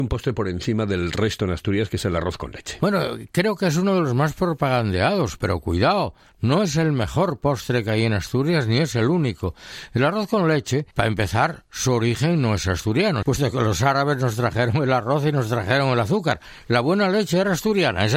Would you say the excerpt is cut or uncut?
cut